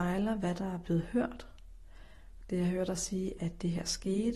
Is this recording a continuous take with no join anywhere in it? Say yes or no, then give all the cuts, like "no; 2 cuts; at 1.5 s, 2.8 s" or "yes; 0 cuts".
no; 1 cut; at 3.4 s